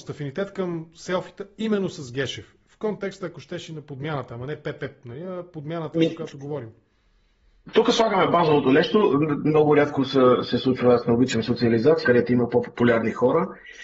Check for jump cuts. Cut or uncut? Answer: cut